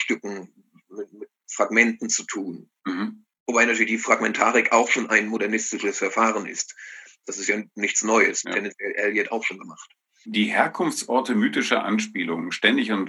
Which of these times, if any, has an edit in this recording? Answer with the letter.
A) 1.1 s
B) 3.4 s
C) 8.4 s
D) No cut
C